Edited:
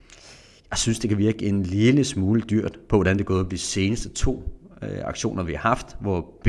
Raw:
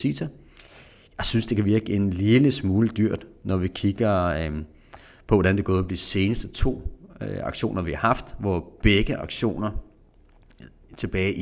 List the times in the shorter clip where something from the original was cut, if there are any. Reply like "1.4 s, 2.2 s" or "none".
2.9 s